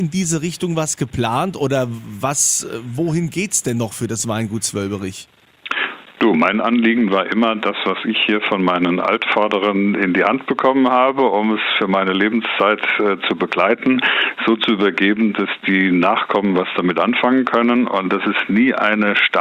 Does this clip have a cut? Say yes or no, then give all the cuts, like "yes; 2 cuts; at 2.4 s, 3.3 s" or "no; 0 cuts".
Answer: no; 0 cuts